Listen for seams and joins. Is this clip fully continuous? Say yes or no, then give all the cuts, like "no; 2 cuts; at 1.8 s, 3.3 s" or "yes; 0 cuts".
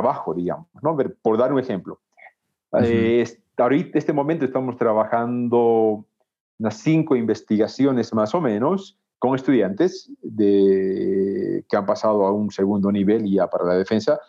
yes; 0 cuts